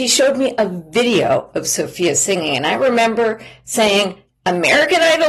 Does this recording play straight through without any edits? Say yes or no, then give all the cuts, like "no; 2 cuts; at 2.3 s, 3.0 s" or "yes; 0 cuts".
yes; 0 cuts